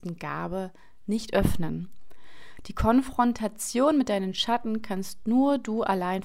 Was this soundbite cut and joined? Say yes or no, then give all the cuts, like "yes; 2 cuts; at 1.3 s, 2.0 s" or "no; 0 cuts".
no; 0 cuts